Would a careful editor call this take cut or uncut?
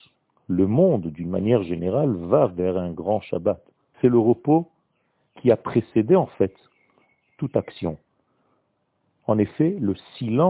cut